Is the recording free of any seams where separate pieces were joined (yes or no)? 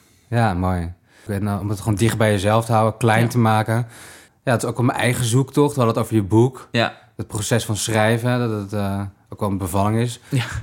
no